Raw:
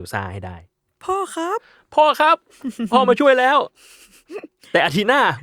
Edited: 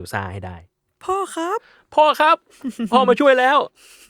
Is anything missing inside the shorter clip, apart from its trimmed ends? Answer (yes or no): no